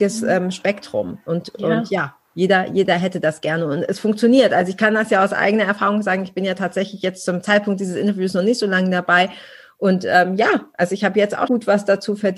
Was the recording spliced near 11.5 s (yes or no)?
yes